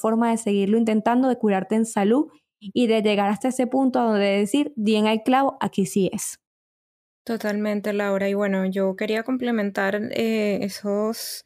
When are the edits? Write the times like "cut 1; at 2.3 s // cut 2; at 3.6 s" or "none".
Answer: none